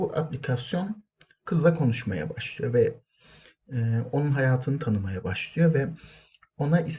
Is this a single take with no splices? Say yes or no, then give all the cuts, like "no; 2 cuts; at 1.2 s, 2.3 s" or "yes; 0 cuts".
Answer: yes; 0 cuts